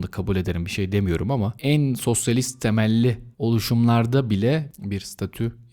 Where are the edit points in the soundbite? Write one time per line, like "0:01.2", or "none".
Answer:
0:03.3